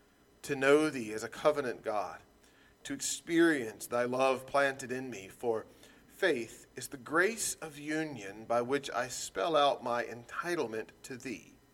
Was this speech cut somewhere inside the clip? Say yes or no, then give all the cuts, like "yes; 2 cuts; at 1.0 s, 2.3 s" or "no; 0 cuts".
no; 0 cuts